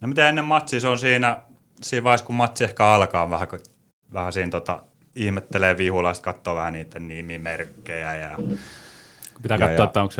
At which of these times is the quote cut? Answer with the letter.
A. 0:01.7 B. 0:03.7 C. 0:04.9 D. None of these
D